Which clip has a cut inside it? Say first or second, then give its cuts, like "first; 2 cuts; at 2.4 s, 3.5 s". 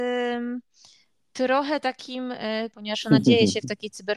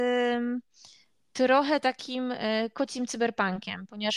first; 1 cut; at 2.7 s